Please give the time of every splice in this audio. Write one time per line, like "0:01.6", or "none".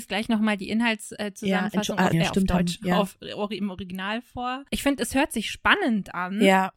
0:02.1